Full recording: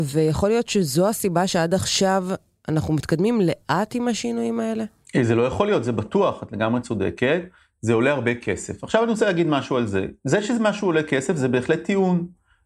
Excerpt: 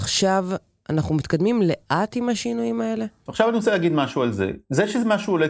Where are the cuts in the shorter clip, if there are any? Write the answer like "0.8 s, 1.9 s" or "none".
3.3 s